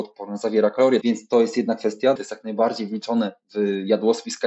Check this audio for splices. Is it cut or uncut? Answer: cut